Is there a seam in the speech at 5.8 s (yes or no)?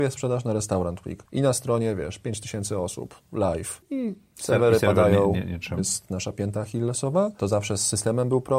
yes